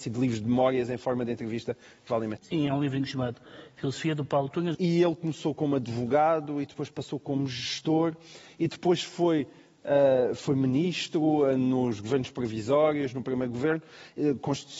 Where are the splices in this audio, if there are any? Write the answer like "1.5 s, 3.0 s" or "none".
2.4 s, 4.7 s